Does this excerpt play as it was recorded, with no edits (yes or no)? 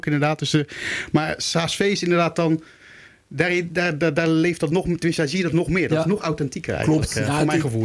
yes